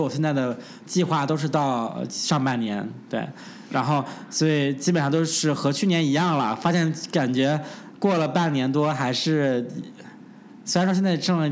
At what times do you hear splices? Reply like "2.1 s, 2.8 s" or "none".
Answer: none